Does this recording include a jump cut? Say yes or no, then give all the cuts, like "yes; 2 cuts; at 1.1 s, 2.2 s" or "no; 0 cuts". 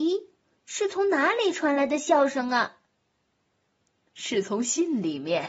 no; 0 cuts